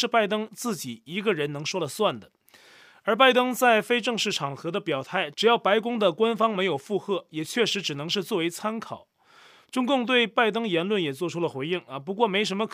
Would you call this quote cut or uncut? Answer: uncut